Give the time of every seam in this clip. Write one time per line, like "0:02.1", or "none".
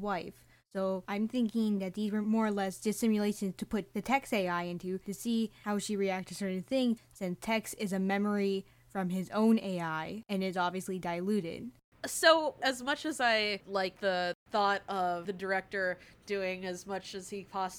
0:07.0